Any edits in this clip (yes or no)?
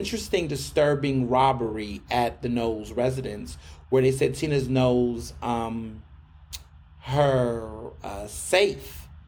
no